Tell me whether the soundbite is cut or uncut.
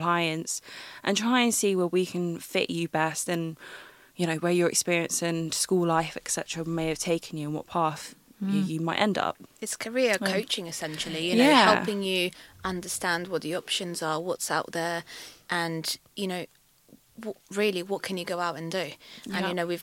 uncut